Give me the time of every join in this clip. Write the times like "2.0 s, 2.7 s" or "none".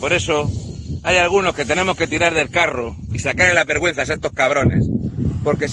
none